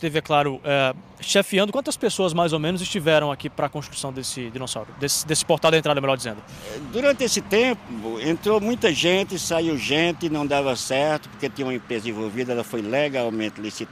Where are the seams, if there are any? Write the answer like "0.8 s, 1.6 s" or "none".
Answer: none